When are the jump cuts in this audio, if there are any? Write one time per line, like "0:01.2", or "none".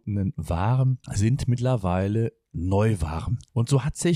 0:01.0